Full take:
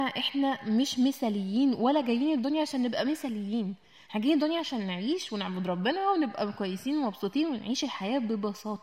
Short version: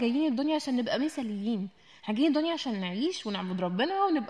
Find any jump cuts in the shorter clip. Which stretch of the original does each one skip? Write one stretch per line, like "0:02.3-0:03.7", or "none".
none